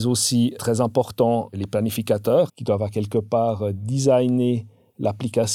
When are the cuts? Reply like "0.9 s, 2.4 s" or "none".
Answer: 2.5 s